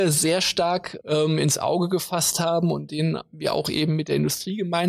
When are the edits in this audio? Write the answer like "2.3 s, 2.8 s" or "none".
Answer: none